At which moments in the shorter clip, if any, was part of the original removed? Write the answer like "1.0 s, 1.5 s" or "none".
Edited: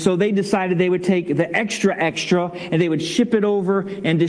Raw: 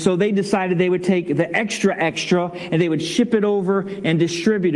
none